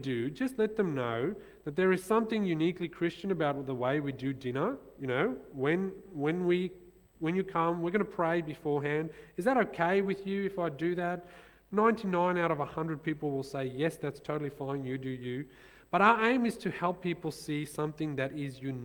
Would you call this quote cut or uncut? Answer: uncut